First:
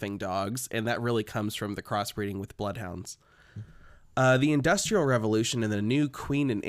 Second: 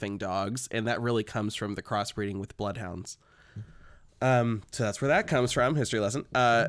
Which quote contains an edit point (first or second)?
second